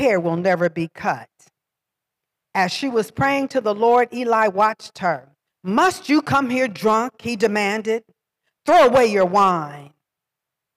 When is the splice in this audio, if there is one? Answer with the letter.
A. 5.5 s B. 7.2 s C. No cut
A